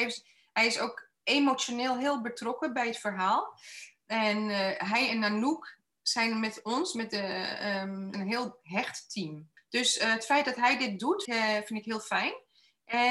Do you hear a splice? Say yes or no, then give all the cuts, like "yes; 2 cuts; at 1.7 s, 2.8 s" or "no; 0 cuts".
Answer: yes; 3 cuts; at 8.1 s, 9.6 s, 11.3 s